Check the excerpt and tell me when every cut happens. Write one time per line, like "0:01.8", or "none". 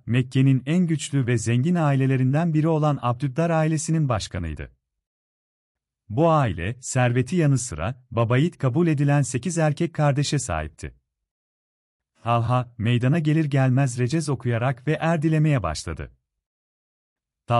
none